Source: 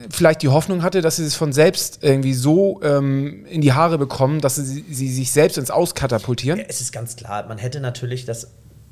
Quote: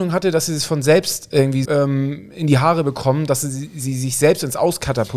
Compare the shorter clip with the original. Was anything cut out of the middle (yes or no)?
yes